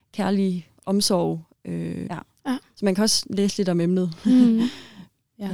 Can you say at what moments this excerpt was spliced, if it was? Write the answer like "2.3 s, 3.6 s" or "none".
2.1 s